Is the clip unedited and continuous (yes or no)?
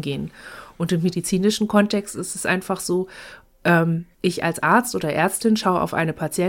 no